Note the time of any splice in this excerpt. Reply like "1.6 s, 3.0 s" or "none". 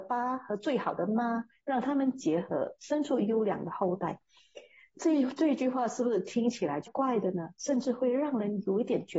6.9 s